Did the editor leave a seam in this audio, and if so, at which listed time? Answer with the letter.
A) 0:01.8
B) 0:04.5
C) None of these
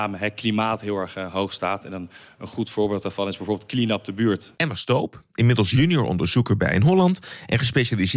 B